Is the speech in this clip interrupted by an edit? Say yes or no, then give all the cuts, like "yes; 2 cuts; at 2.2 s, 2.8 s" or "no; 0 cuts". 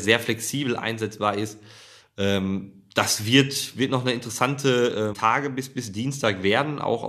yes; 1 cut; at 5.1 s